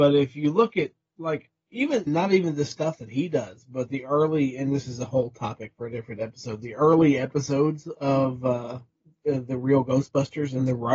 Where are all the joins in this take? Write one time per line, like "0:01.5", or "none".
0:02.1